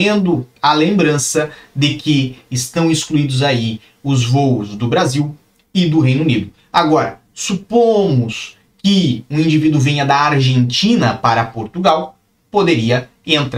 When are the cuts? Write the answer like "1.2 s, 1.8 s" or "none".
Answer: none